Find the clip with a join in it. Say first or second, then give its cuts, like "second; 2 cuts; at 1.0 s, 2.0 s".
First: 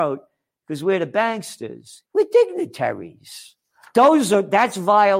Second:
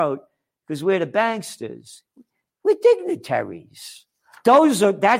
first; 1 cut; at 2.1 s